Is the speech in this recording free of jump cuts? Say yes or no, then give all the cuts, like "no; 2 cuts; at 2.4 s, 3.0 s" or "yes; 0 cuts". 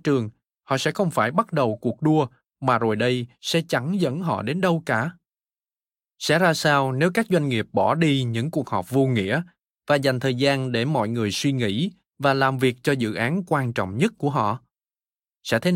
yes; 0 cuts